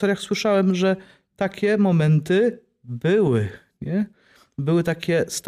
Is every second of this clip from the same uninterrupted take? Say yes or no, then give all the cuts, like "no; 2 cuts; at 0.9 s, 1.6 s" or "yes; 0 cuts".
yes; 0 cuts